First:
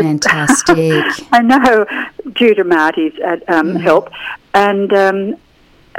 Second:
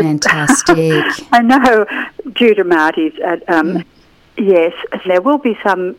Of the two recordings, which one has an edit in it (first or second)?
second